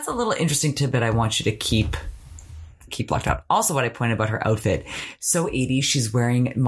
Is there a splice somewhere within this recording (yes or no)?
no